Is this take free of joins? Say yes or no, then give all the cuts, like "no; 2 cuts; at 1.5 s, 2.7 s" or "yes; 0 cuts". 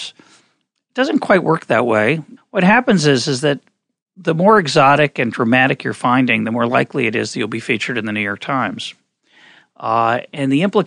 no; 2 cuts; at 2.4 s, 9.6 s